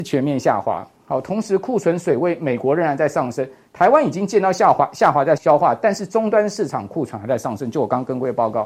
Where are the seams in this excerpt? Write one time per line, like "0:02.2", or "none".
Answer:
0:05.4